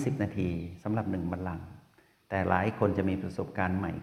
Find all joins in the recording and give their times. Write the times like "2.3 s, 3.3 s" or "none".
none